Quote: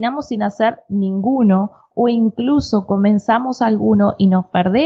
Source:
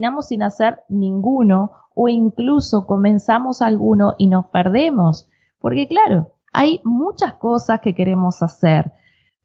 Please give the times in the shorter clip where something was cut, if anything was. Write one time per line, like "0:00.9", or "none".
none